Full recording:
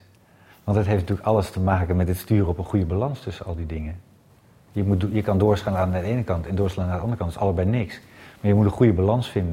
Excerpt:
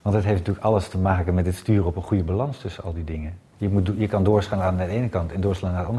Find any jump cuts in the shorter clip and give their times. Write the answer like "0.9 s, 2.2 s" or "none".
3.5 s